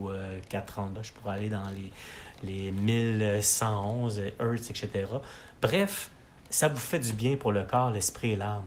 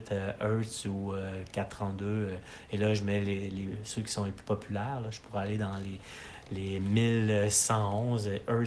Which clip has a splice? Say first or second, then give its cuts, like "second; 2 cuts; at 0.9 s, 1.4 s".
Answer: first; 1 cut; at 0.9 s